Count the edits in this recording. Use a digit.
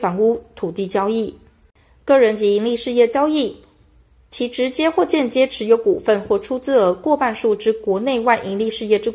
0